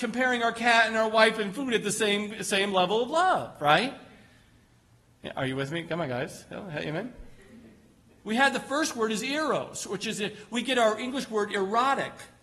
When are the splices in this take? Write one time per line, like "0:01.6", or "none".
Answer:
0:08.2